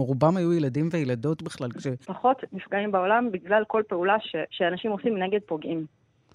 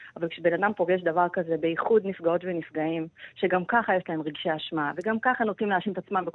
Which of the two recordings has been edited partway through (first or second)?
first